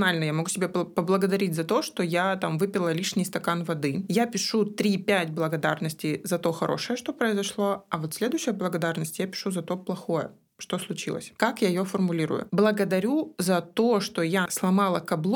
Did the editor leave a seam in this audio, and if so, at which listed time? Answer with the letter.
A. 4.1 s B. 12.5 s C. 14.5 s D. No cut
C